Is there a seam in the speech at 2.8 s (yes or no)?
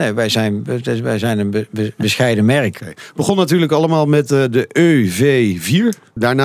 yes